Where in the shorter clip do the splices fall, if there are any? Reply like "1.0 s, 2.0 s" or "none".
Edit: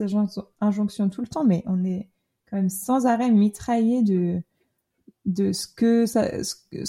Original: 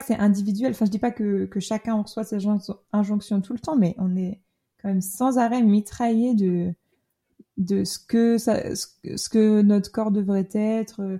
none